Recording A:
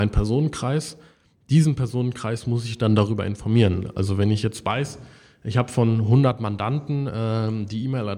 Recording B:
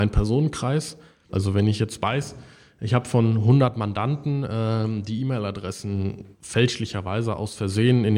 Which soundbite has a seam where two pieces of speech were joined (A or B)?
B